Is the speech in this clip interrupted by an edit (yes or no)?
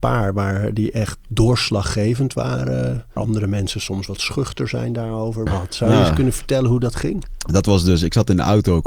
yes